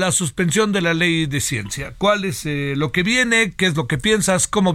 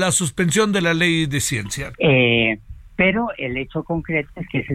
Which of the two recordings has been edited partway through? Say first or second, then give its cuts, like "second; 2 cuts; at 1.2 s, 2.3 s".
second; 1 cut; at 1.9 s